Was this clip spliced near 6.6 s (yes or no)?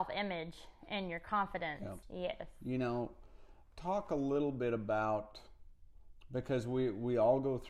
no